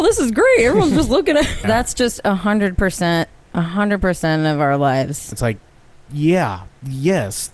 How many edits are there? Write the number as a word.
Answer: two